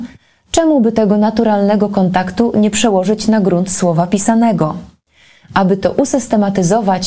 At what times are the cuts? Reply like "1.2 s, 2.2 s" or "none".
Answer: none